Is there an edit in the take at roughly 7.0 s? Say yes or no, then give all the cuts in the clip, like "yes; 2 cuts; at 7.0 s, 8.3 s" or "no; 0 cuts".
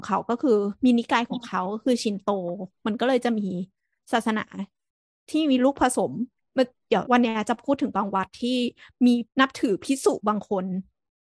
yes; 2 cuts; at 7.0 s, 9.3 s